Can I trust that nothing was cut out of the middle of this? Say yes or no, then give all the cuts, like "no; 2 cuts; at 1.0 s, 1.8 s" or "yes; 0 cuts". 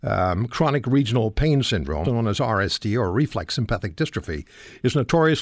no; 1 cut; at 2.0 s